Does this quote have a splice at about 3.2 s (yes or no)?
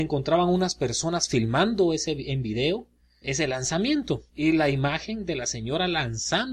yes